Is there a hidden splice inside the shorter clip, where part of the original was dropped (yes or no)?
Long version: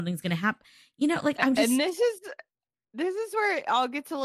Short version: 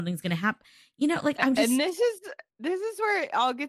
yes